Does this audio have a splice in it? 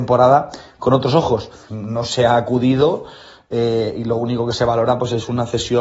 yes; 1 cut; at 1.7 s

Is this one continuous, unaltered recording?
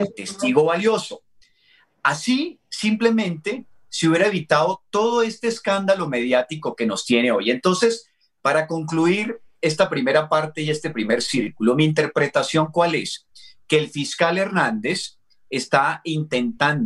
yes; 0 cuts

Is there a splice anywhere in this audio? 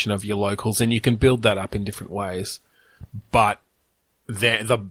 no; 0 cuts

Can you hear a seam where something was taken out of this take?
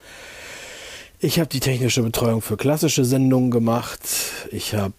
no; 0 cuts

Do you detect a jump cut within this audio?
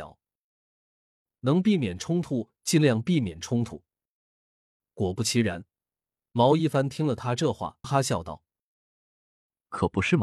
yes; 2 cuts; at 4.8 s, 7.8 s

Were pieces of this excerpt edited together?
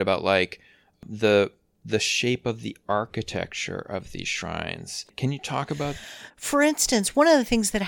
yes; 2 cuts; at 5.1 s, 6.3 s

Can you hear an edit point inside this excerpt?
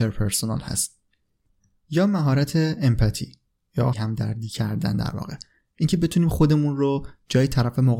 yes; 1 cut; at 3.9 s

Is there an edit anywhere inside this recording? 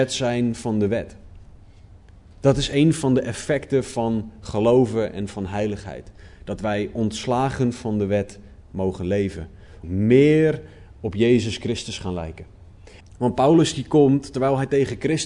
yes; 2 cuts; at 9.8 s, 13.0 s

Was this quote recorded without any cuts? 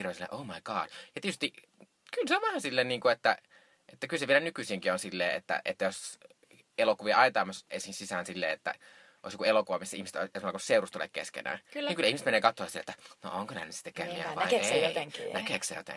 yes; 0 cuts

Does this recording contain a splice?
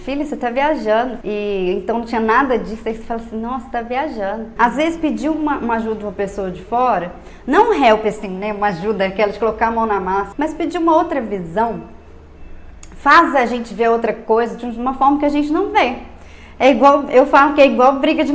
yes; 3 cuts; at 1.2 s, 4.6 s, 10.3 s

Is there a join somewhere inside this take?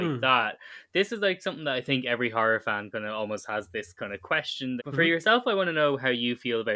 yes; 1 cut; at 4.8 s

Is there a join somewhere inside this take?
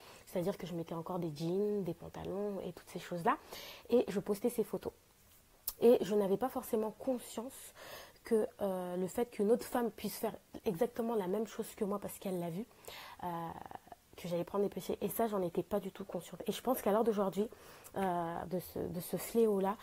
yes; 3 cuts; at 5.8 s, 14.0 s, 18.4 s

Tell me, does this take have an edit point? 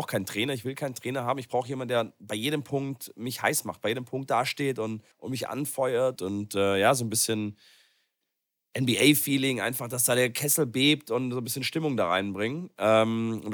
yes; 2 cuts; at 5.1 s, 6.2 s

